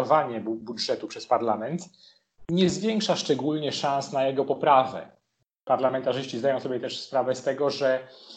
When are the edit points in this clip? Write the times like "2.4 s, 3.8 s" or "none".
none

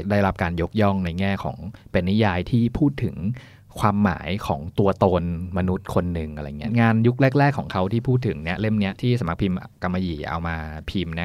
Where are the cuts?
none

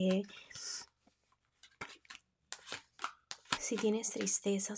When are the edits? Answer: 3.6 s

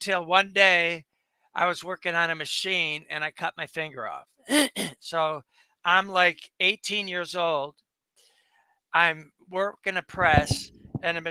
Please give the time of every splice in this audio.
none

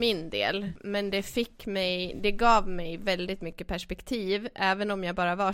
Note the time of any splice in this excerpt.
none

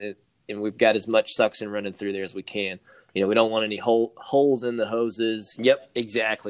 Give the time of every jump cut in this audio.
5.6 s

